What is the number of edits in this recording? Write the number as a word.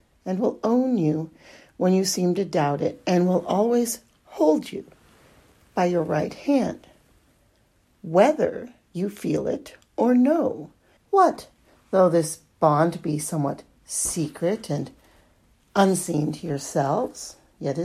one